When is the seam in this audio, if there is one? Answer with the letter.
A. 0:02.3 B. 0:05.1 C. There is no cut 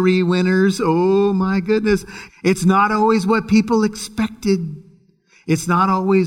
A